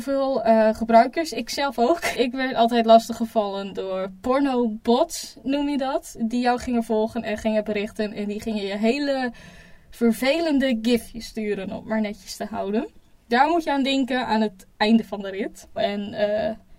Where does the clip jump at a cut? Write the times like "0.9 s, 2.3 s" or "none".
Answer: 2.1 s, 15.8 s